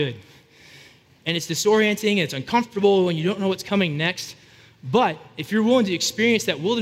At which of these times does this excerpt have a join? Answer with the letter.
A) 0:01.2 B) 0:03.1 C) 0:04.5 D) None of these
A